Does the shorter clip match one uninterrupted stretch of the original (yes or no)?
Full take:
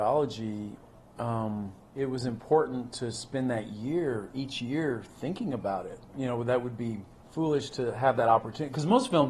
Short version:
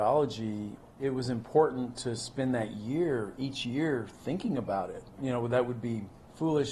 no